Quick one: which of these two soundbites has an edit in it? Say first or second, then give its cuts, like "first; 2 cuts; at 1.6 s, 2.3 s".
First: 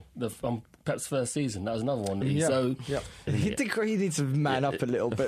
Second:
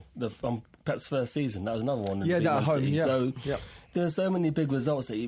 first; 2 cuts; at 2.2 s, 3.3 s